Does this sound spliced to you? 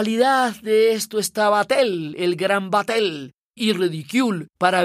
no; 0 cuts

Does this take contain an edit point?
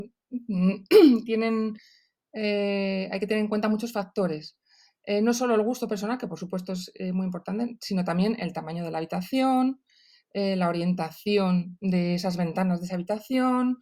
no; 0 cuts

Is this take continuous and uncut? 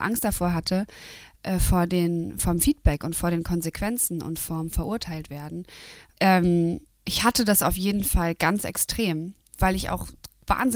no; 2 cuts; at 6.1 s, 9.5 s

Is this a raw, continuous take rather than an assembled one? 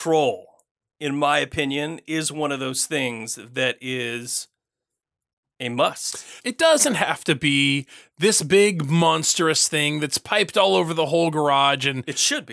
no; 1 cut; at 6.4 s

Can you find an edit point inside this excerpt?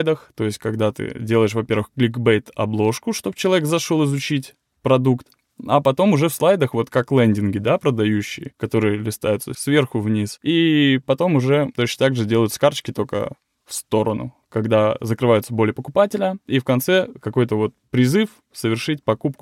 no; 0 cuts

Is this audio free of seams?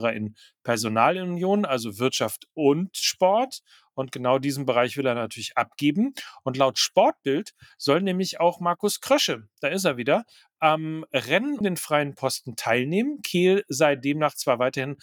no; 1 cut; at 11.6 s

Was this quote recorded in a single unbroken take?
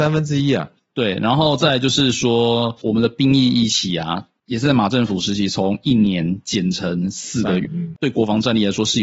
no; 1 cut; at 7.7 s

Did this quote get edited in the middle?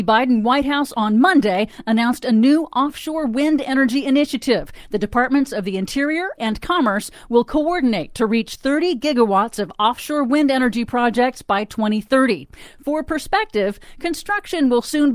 yes; 1 cut; at 6.4 s

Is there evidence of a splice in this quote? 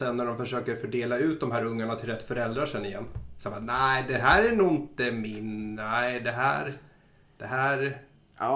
no; 0 cuts

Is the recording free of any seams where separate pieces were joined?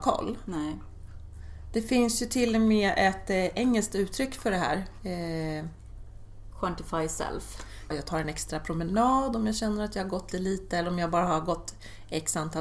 no; 2 cuts; at 7.9 s, 10.3 s

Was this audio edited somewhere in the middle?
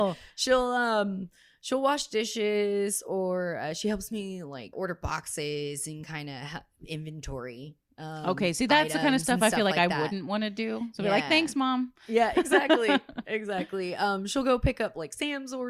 yes; 1 cut; at 4.7 s

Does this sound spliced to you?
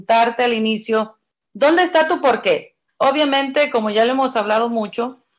yes; 1 cut; at 2.9 s

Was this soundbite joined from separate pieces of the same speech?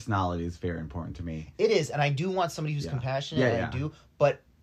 no; 0 cuts

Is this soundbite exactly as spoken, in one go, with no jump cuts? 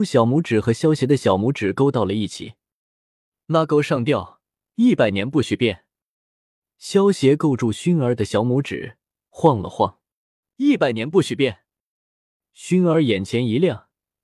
no; 1 cut; at 10.4 s

